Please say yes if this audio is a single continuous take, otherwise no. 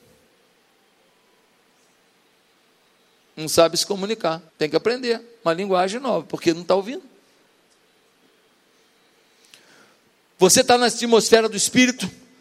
no